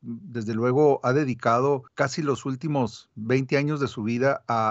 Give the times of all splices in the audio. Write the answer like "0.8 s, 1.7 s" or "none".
1.9 s